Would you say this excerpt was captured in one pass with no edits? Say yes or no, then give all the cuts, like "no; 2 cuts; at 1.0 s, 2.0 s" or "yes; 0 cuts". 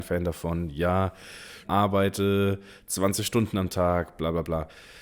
no; 1 cut; at 1.6 s